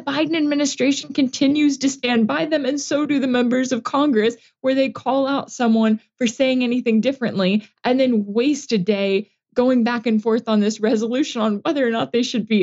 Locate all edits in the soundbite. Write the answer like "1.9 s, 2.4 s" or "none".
none